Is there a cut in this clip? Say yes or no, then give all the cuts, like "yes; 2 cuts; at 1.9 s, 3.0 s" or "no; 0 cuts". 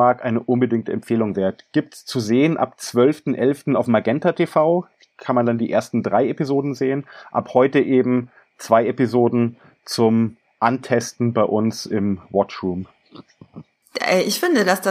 no; 0 cuts